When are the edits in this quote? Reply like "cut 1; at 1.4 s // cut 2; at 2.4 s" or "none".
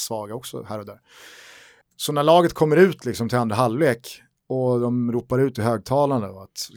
cut 1; at 1.8 s